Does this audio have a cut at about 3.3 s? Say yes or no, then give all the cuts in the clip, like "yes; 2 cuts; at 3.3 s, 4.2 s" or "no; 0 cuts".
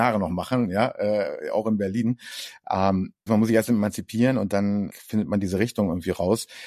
yes; 2 cuts; at 3.3 s, 4.9 s